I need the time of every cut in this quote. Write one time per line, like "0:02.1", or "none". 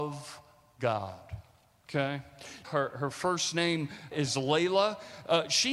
0:02.6
0:04.1